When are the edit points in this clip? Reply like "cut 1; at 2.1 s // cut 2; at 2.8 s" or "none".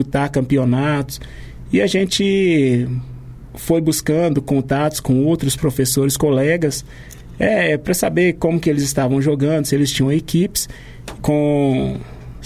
cut 1; at 11.2 s